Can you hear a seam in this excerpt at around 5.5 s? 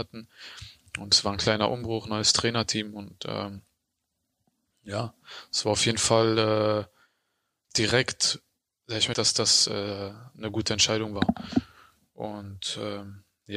no; 1 cut; at 9.1 s

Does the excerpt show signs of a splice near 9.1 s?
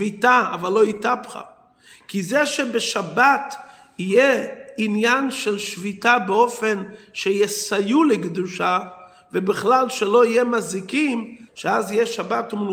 no; 1 cut; at 11.5 s

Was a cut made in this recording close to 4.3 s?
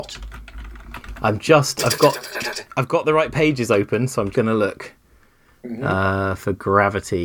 yes; 1 cut; at 4.3 s

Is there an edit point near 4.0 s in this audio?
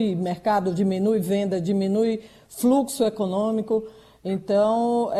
no; 0 cuts

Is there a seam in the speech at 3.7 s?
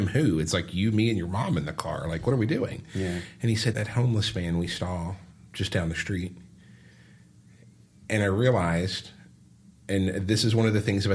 yes; 1 cut; at 3.7 s

